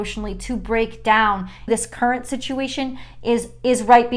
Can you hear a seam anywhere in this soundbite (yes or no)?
yes